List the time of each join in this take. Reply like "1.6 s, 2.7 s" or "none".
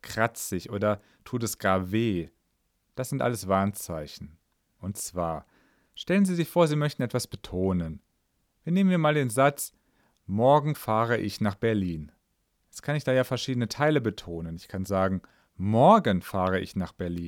4.8 s